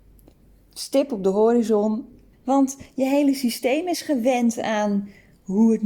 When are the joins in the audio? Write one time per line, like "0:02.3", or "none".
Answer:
0:02.3